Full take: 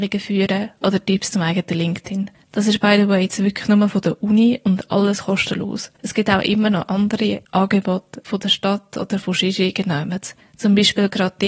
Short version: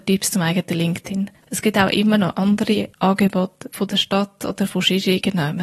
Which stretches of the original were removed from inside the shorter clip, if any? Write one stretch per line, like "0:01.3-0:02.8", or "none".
0:02.4-0:05.9